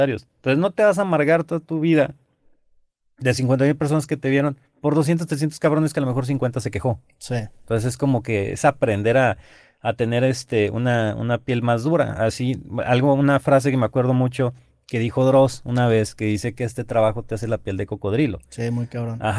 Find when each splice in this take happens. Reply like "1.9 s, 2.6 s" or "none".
none